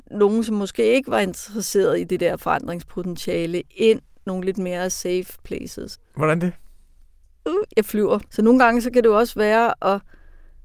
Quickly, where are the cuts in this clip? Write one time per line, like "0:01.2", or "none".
0:05.9
0:08.3